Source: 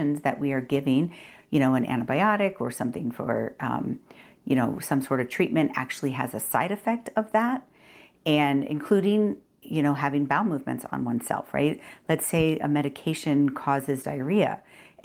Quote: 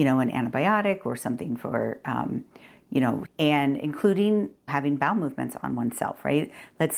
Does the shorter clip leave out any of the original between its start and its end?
yes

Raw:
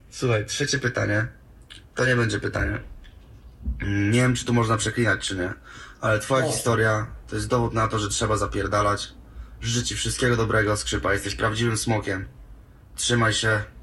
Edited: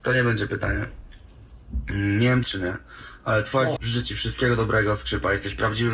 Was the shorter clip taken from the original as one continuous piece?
no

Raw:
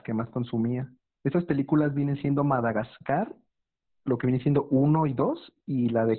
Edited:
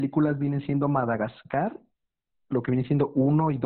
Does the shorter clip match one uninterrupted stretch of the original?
yes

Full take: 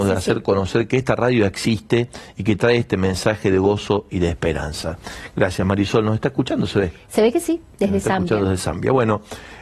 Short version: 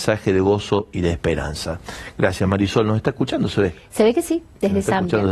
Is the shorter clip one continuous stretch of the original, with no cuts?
yes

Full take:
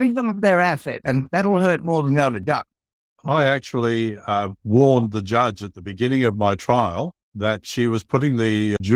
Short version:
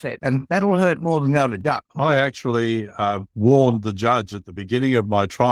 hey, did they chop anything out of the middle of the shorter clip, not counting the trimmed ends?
yes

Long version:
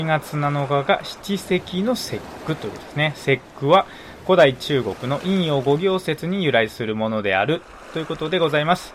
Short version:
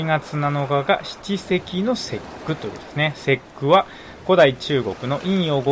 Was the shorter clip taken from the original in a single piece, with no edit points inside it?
yes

